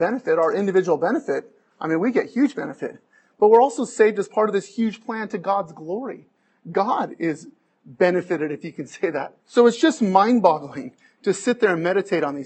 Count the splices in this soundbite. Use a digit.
1